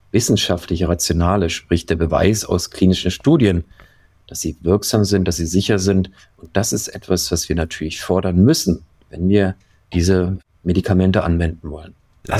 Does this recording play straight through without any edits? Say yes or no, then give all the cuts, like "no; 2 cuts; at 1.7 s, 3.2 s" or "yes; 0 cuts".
yes; 0 cuts